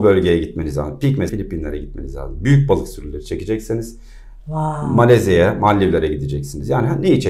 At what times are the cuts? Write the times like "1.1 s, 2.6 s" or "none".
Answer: 1.3 s